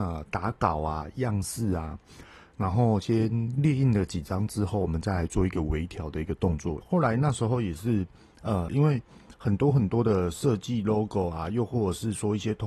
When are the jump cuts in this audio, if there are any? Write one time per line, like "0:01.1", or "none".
0:06.8
0:08.7

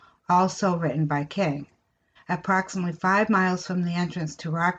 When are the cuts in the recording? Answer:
0:02.2

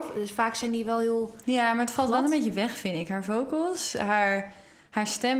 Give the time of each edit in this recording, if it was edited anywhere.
none

